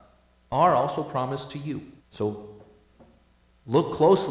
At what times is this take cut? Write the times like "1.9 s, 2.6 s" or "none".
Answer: 2.0 s